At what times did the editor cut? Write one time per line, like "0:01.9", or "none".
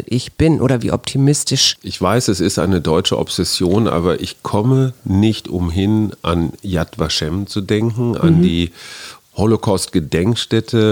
none